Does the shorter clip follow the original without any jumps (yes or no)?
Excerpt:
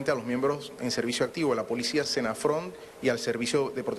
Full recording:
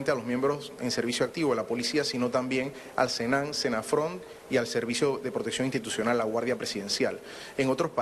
no